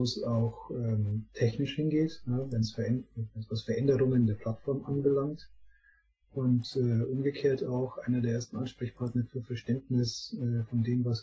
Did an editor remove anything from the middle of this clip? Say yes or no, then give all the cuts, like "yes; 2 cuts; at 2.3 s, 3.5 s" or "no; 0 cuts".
no; 0 cuts